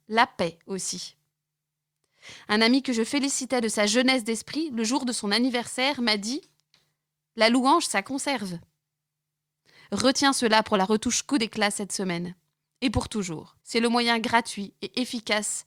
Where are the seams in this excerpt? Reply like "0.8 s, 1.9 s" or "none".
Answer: 13.6 s